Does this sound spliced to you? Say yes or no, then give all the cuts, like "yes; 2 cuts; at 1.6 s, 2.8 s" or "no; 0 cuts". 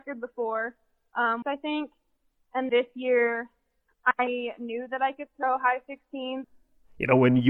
yes; 3 cuts; at 1.4 s, 2.7 s, 6.4 s